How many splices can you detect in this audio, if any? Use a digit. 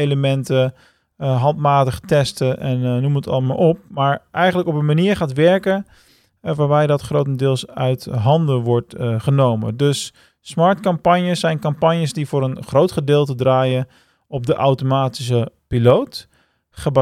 0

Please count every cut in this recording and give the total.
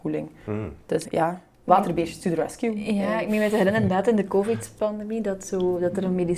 1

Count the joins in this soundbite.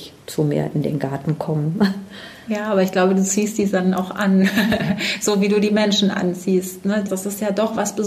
1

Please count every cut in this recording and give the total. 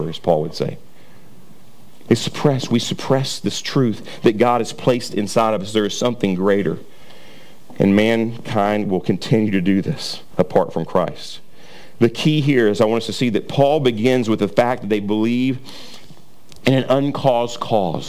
0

